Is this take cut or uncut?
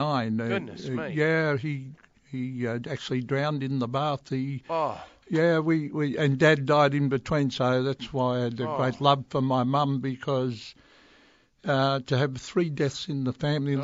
uncut